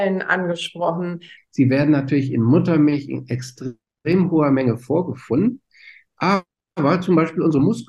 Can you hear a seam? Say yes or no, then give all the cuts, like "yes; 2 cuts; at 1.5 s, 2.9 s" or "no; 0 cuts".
yes; 1 cut; at 1.4 s